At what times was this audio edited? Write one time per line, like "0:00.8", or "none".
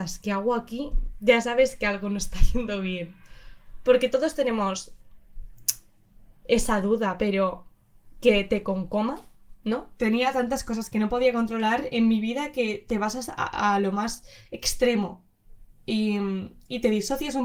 0:10.0